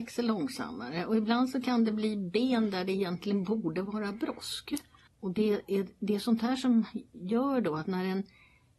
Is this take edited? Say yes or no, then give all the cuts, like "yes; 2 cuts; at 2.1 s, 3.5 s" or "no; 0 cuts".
yes; 1 cut; at 5.1 s